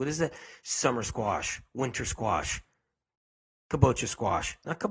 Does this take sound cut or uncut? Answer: uncut